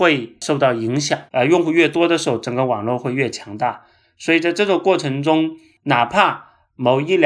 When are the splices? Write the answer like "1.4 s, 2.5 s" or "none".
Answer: 1.3 s